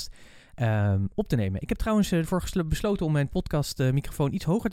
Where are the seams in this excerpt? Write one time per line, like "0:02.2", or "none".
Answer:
none

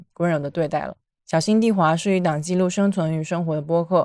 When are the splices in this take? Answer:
0:01.2

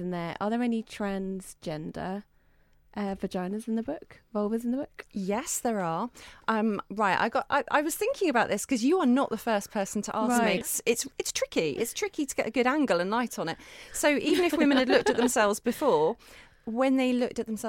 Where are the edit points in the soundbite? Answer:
0:10.6

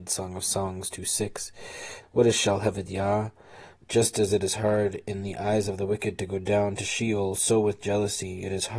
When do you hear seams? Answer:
0:02.0
0:03.7

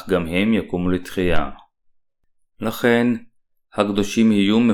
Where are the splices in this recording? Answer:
none

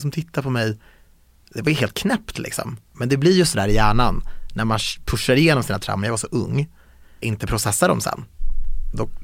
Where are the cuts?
0:07.2

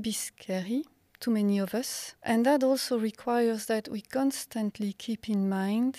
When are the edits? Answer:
0:02.2

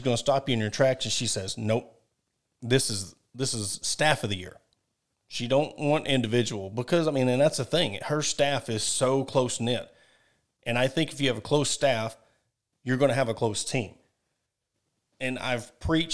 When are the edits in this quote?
none

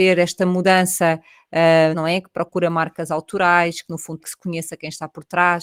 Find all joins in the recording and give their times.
0:01.9
0:04.2

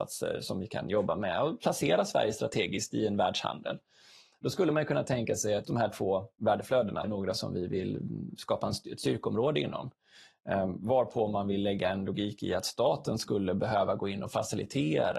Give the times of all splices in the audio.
0:05.6
0:07.0

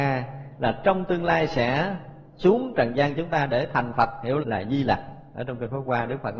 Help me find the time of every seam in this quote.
0:04.4

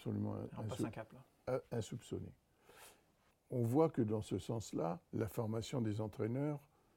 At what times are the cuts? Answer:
0:03.3
0:05.0

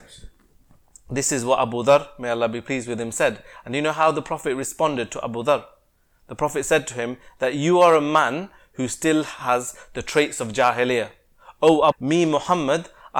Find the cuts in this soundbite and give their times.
0:11.9

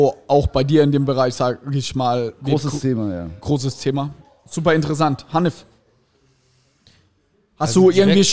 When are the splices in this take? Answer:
none

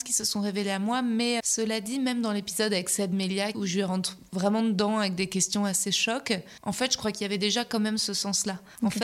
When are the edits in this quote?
0:01.4
0:03.5

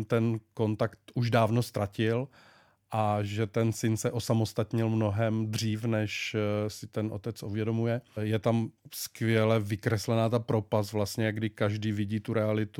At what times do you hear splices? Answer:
none

